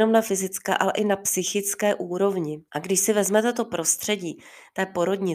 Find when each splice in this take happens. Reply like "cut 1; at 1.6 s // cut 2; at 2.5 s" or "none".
cut 1; at 2.7 s